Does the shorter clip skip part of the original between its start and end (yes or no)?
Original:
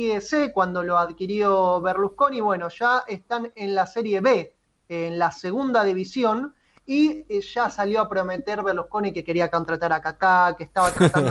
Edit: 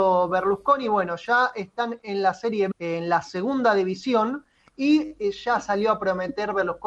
yes